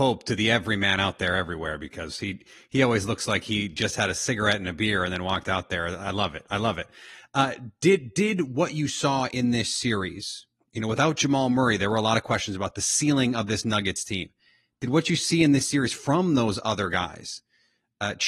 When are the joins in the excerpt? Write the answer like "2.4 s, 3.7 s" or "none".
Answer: none